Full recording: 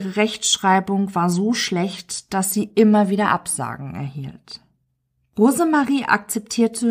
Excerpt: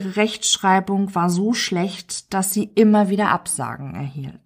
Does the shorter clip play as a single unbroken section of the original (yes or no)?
yes